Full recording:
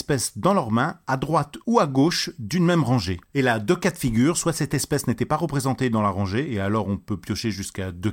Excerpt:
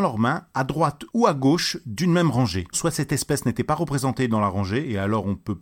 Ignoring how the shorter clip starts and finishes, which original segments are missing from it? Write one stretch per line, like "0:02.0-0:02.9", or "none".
0:03.3-0:04.3